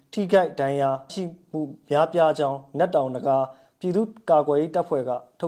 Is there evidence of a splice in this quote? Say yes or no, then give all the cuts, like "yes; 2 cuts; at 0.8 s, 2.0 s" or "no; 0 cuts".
yes; 1 cut; at 1.1 s